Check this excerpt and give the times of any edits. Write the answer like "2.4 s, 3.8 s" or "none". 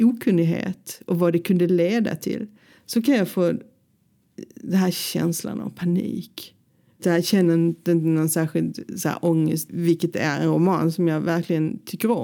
7.0 s, 9.7 s